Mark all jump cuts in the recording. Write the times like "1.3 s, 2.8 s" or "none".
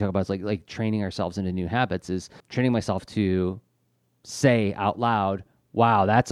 2.4 s